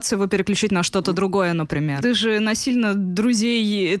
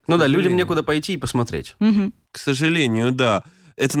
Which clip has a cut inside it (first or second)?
first